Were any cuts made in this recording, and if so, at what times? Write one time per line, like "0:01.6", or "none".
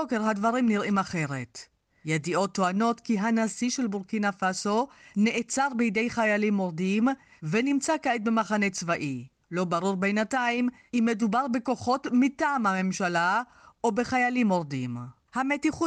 0:09.4